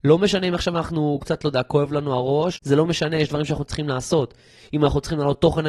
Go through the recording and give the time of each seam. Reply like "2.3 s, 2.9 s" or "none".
2.6 s